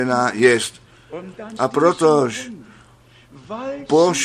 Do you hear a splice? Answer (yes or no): yes